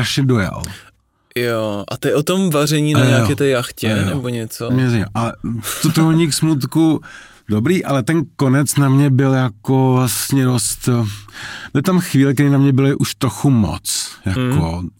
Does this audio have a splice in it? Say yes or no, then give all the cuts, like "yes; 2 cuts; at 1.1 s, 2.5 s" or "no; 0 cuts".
yes; 1 cut; at 4.7 s